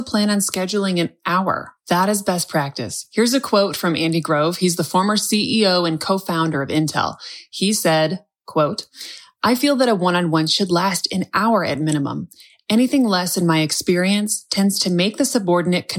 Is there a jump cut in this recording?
no; 0 cuts

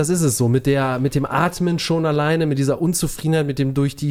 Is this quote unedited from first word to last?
yes; 0 cuts

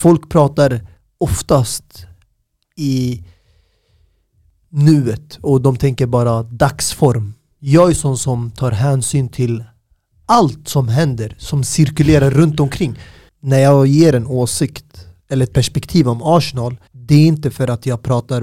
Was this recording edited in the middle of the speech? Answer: yes; 2 cuts; at 13.3 s, 16.9 s

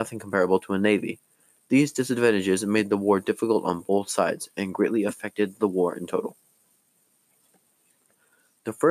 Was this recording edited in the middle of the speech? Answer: no; 0 cuts

